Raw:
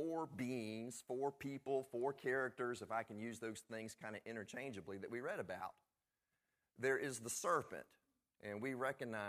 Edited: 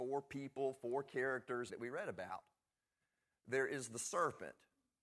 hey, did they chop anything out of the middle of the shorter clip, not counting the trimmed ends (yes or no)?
yes